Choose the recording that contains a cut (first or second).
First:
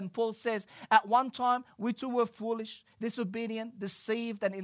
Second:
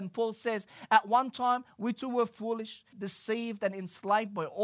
second